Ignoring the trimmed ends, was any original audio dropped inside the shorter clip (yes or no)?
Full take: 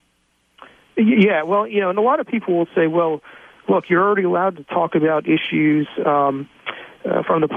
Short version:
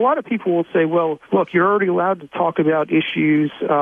yes